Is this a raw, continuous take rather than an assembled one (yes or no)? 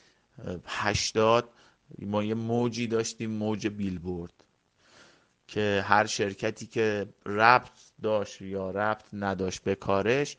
yes